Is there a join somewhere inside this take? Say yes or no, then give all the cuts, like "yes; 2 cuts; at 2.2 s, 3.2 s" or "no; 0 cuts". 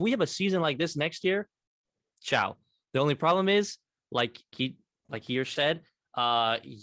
yes; 2 cuts; at 4.5 s, 5.6 s